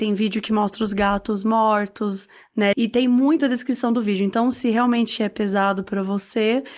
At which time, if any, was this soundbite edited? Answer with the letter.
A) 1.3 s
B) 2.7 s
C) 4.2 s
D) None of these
B